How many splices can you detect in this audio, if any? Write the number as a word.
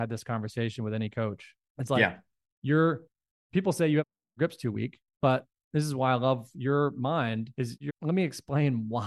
one